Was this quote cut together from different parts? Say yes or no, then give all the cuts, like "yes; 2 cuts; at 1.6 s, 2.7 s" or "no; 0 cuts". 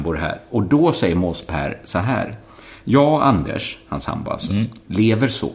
no; 0 cuts